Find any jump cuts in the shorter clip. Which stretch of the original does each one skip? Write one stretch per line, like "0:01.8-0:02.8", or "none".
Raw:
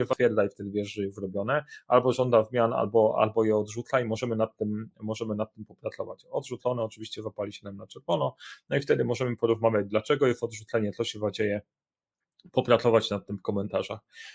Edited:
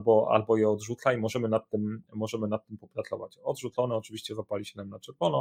none